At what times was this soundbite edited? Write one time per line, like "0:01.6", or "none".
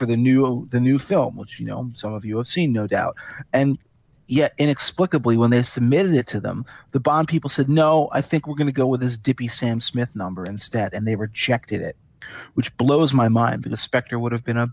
none